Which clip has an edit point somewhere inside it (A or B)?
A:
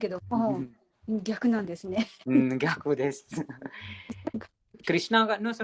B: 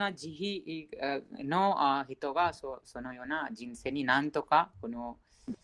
A